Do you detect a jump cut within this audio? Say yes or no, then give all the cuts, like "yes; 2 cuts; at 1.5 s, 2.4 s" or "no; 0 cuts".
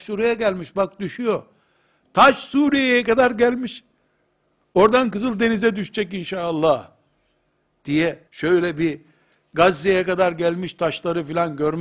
yes; 1 cut; at 8.3 s